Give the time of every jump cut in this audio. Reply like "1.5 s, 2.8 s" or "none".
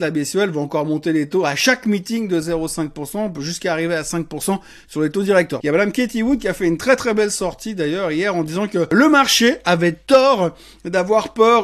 5.6 s